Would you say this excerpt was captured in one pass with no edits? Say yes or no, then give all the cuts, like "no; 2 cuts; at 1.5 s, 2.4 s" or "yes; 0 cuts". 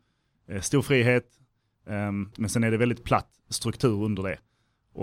no; 1 cut; at 2.3 s